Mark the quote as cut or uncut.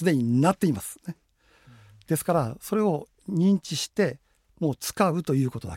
uncut